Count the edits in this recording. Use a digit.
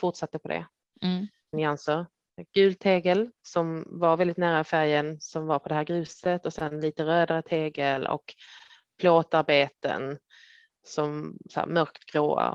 1